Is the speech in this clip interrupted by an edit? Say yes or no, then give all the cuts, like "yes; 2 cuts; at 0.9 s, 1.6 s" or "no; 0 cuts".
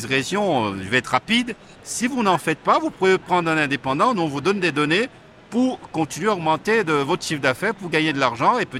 yes; 1 cut; at 1.7 s